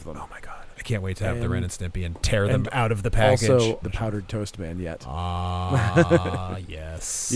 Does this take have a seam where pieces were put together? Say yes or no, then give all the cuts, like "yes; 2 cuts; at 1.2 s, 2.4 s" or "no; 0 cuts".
yes; 1 cut; at 3.8 s